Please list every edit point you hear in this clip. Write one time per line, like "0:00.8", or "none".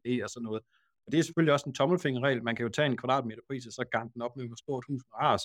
none